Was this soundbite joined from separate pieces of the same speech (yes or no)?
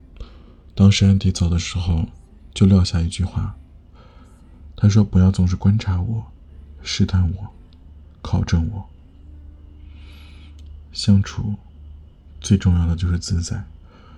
no